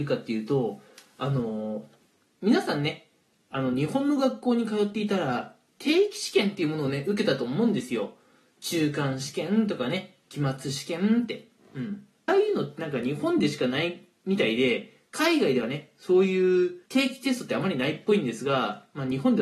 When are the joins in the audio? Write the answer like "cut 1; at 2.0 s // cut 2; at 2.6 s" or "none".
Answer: cut 1; at 12.3 s // cut 2; at 16.9 s